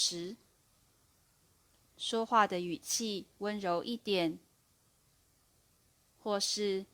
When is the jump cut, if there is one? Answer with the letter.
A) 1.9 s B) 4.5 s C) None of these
A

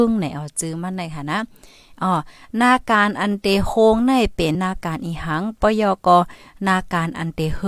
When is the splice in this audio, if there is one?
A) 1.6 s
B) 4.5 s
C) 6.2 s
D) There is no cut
B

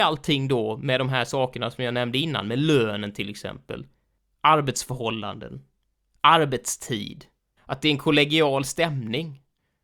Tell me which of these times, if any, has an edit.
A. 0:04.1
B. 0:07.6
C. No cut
B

